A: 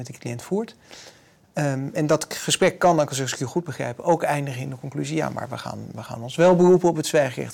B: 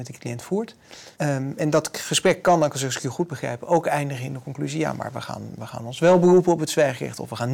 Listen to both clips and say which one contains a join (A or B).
B